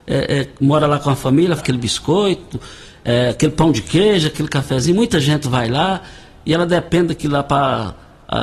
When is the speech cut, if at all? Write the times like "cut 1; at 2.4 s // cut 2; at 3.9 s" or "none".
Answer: cut 1; at 1.6 s